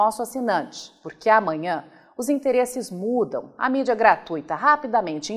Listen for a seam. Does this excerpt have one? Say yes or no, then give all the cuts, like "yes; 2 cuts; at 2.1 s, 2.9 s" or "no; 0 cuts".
no; 0 cuts